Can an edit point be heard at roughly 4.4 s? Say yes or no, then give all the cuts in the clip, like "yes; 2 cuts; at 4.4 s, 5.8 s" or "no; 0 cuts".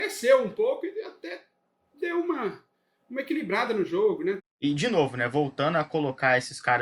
yes; 1 cut; at 4.4 s